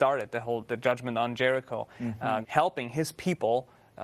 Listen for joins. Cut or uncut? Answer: cut